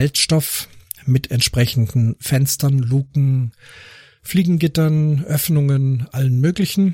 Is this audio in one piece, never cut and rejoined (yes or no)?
yes